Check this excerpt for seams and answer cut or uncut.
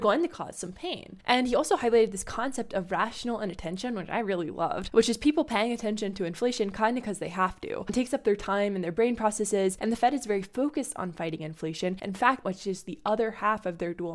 cut